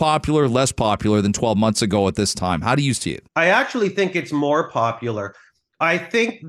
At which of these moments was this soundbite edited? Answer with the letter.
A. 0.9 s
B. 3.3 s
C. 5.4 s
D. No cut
B